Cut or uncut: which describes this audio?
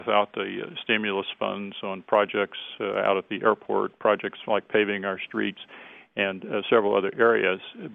uncut